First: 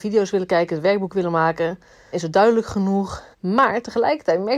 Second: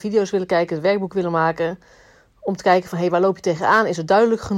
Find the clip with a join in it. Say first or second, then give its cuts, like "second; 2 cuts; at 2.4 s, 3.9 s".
first; 2 cuts; at 2.1 s, 3.3 s